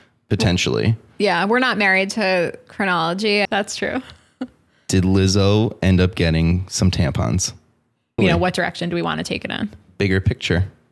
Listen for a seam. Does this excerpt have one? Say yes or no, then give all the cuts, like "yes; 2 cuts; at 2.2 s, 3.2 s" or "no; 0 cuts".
yes; 2 cuts; at 3.5 s, 8.2 s